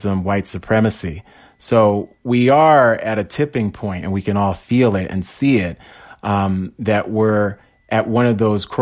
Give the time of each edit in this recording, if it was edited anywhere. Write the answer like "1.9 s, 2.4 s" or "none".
4.0 s